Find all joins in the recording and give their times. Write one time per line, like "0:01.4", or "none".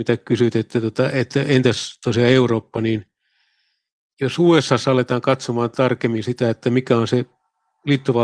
none

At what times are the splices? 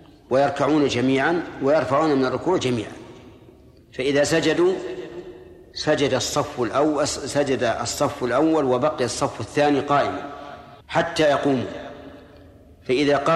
0:10.8

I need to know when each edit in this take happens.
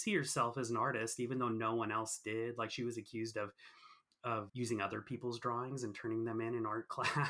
0:04.5

